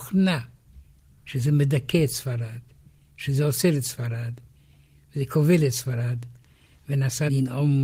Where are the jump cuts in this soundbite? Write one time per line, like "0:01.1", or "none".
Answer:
none